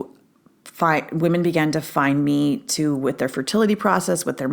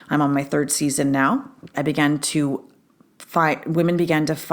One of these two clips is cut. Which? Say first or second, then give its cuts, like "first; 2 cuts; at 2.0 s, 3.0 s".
second; 1 cut; at 1.7 s